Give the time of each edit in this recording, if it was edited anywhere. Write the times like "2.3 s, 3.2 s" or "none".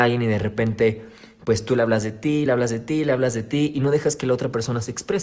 none